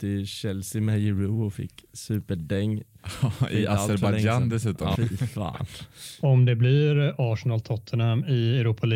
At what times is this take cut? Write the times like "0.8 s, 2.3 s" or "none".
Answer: 4.9 s